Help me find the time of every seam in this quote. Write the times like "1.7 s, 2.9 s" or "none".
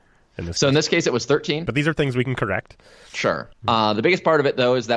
1.7 s, 3.6 s

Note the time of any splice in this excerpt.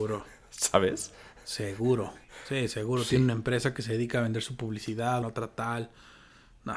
5.2 s

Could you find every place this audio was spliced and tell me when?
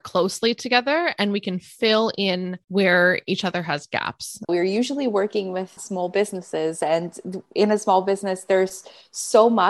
4.5 s

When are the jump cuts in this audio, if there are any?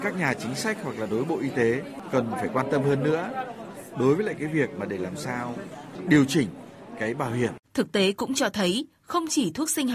7.6 s

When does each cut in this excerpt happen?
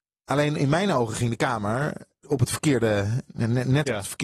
2.2 s

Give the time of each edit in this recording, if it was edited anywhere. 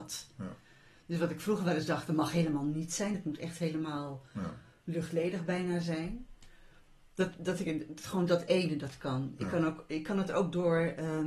none

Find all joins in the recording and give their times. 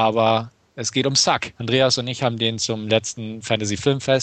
1.6 s

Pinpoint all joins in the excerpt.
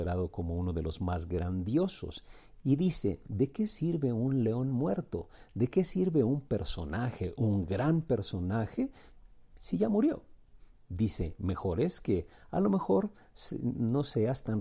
none

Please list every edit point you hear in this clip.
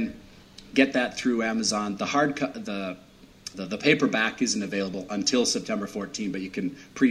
3.5 s

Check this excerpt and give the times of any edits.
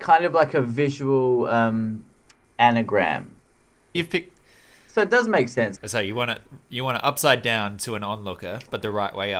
3.9 s, 5.8 s

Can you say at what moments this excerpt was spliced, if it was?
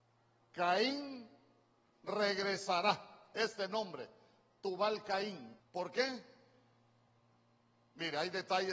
5.6 s

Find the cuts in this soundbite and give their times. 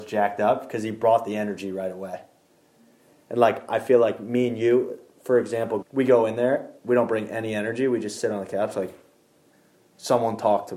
5.8 s

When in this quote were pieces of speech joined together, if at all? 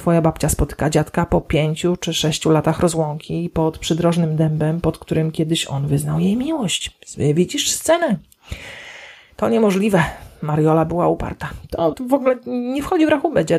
11.9 s

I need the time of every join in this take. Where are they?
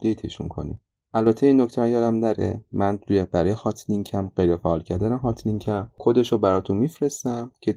none

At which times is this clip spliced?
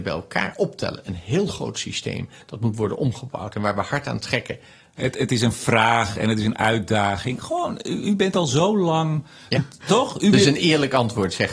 5.0 s, 9.5 s

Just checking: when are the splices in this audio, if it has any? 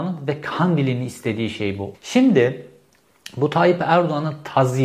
1.9 s

